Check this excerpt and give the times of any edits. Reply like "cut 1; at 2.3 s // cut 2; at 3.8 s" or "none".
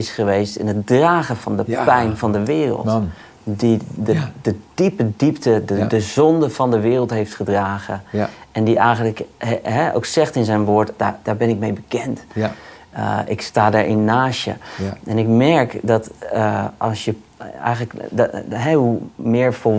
cut 1; at 11.0 s